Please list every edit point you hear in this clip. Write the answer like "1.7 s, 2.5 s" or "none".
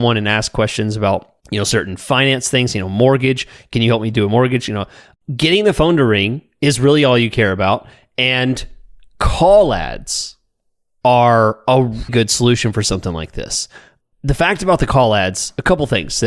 1.4 s, 12.1 s